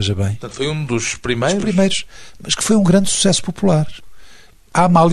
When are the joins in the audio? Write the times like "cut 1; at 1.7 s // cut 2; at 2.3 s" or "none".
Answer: none